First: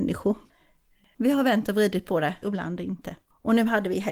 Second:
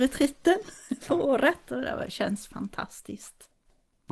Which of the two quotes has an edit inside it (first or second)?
first